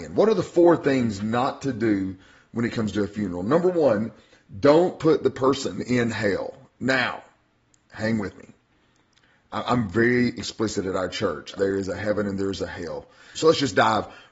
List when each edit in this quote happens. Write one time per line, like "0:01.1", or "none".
0:11.6
0:13.3